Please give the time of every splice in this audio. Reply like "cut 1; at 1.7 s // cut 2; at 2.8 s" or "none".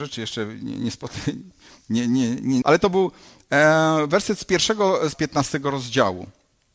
cut 1; at 2.6 s // cut 2; at 5.1 s